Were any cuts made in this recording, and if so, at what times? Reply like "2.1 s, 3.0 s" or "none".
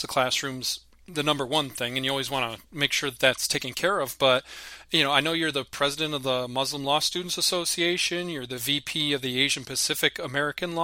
none